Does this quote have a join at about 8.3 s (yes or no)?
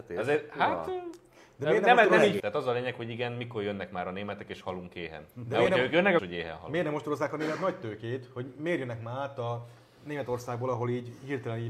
no